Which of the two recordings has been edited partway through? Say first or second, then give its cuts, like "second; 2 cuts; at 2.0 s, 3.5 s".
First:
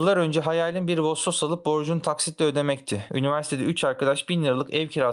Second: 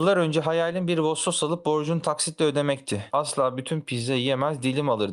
second; 1 cut; at 3.1 s